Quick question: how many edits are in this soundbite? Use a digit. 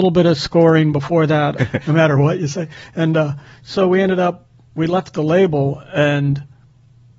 1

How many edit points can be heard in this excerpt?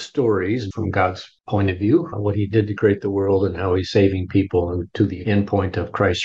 1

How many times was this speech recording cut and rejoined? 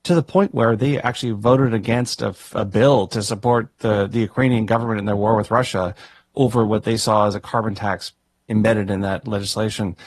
1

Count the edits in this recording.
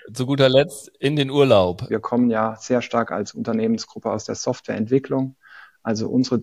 1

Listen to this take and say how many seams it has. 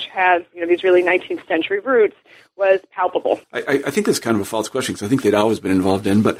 1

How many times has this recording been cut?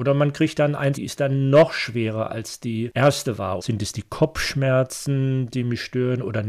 2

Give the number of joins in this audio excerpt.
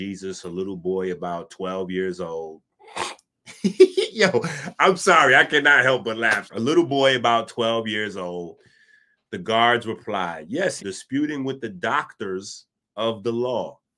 2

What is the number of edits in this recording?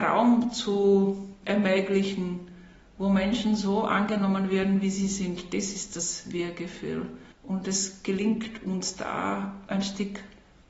1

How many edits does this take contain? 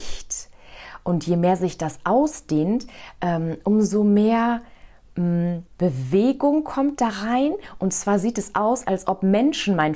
1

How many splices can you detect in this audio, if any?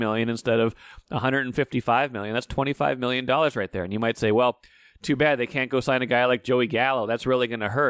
0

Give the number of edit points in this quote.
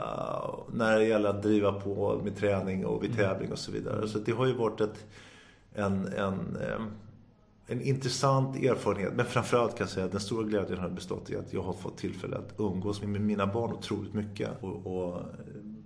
2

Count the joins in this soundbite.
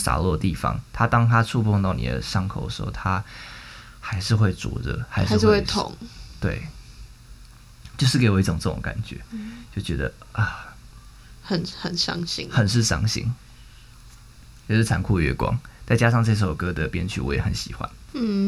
0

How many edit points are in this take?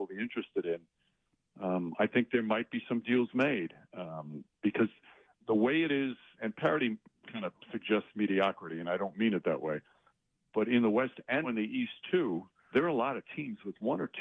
3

